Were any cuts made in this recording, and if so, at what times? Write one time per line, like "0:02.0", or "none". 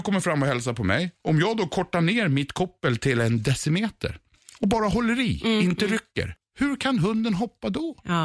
0:06.4